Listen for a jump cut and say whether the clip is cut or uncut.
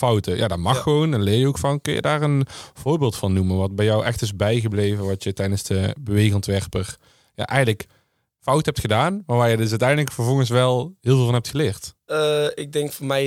uncut